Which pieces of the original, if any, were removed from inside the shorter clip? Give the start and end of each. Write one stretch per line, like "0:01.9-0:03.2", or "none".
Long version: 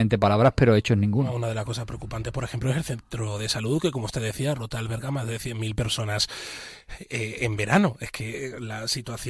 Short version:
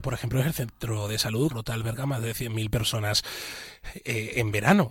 0:03.8-0:04.6